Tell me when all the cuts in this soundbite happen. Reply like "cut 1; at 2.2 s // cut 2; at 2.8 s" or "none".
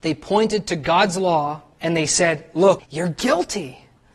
cut 1; at 1.7 s // cut 2; at 2.8 s